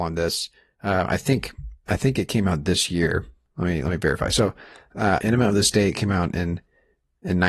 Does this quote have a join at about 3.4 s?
no; 1 cut; at 5.2 s

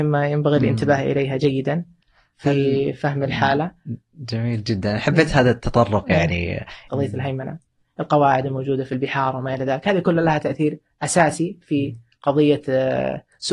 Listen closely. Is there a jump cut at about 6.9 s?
yes; 1 cut; at 6.9 s

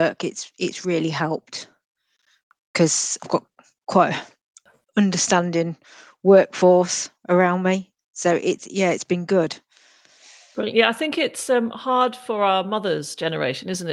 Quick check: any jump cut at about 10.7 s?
no; 1 cut; at 3.2 s

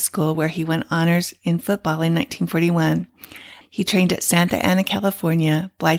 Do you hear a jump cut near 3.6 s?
yes; 1 cut; at 3.6 s

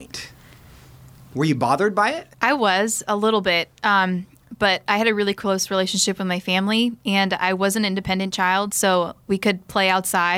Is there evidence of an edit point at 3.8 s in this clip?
no; 2 cuts; at 2.3 s, 9.3 s

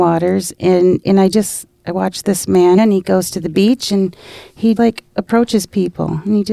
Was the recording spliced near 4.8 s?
yes; 2 cuts; at 2.8 s, 4.8 s

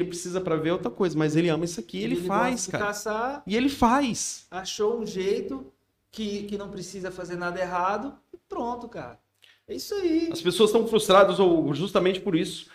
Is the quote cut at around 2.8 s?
no; 0 cuts

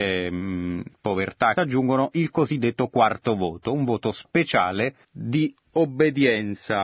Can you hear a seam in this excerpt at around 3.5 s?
no; 2 cuts; at 1.6 s, 5.0 s

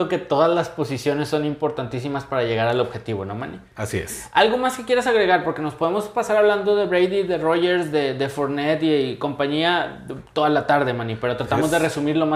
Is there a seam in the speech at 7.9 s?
no; 0 cuts

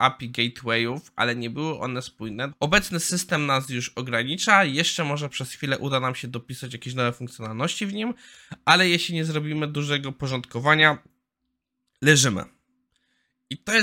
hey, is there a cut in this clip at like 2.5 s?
yes; 1 cut; at 2.5 s

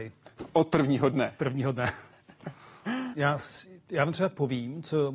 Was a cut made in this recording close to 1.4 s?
no; 1 cut; at 3.1 s

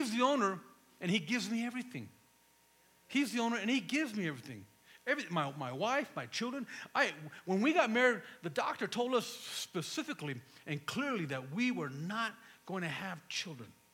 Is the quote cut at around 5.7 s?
no; 0 cuts

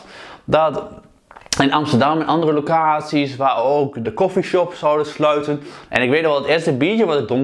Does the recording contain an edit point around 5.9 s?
yes; 2 cuts; at 4.0 s, 5.9 s

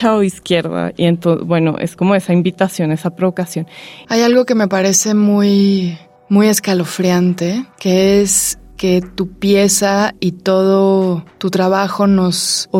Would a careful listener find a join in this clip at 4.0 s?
yes; 1 cut; at 4.0 s

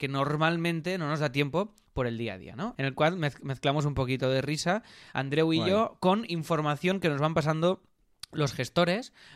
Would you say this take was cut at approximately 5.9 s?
no; 1 cut; at 2.7 s

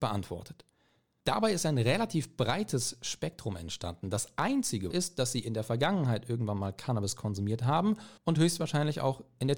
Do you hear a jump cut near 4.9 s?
yes; 2 cuts; at 4.9 s, 8.2 s

